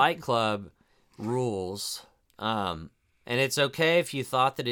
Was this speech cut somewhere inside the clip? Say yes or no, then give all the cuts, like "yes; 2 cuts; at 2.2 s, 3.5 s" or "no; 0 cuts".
no; 0 cuts